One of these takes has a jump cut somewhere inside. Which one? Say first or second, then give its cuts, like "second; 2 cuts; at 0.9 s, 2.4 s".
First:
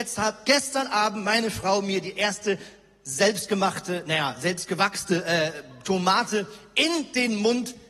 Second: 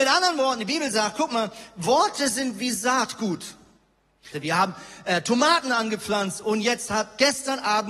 second; 1 cut; at 4.3 s